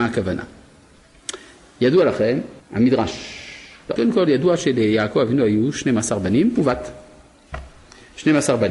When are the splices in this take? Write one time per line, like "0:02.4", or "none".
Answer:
0:02.6
0:04.0